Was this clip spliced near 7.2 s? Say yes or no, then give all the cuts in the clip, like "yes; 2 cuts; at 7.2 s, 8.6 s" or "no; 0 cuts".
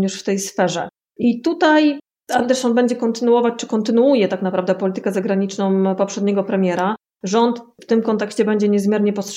yes; 1 cut; at 7.2 s